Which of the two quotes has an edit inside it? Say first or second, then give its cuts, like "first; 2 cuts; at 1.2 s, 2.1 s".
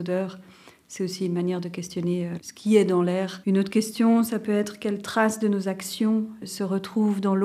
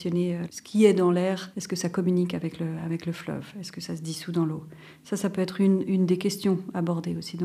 first; 2 cuts; at 3.4 s, 6.4 s